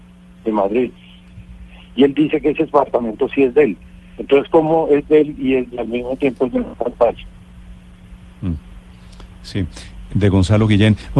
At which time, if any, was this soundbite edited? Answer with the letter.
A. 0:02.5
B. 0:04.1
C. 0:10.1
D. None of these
C